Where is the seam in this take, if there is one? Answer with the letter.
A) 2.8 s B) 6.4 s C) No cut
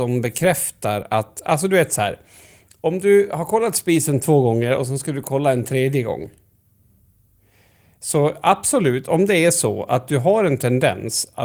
C